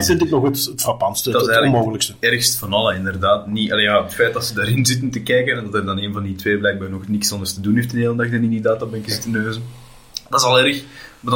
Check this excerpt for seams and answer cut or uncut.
uncut